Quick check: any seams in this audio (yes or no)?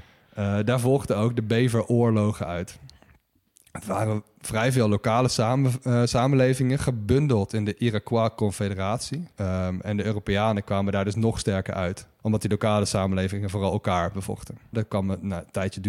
yes